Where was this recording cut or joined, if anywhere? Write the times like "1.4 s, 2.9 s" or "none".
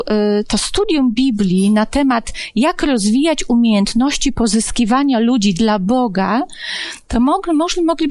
none